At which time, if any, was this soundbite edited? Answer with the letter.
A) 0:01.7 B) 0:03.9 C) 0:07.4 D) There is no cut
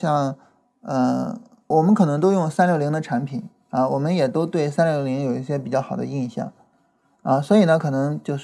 A